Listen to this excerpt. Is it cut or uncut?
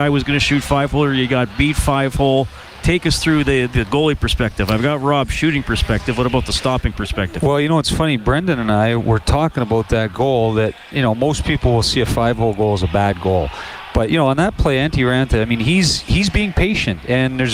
uncut